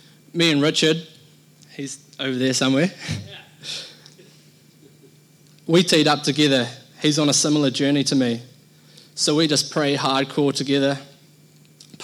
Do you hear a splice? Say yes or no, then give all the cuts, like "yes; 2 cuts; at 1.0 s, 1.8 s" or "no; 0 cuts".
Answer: no; 0 cuts